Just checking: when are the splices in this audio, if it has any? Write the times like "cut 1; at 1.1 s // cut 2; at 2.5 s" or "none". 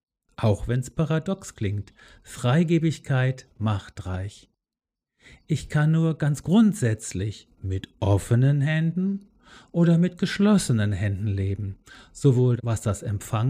none